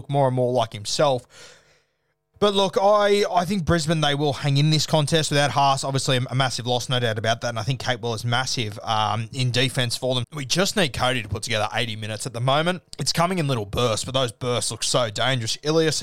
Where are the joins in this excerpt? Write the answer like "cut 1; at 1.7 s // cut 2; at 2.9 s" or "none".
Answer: cut 1; at 2.3 s // cut 2; at 10.2 s // cut 3; at 12.9 s